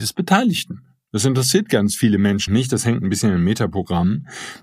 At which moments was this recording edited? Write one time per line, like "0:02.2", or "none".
0:02.5